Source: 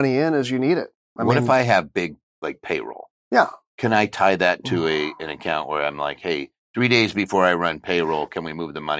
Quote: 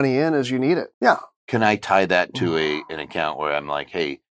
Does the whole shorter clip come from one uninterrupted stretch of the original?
no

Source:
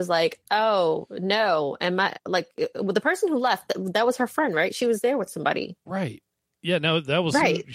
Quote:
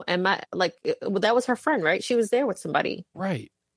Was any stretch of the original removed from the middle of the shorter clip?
yes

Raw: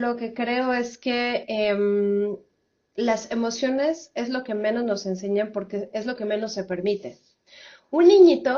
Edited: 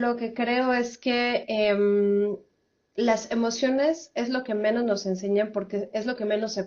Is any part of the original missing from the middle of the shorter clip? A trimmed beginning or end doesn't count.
no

